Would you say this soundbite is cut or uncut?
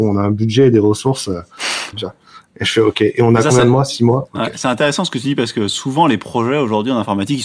cut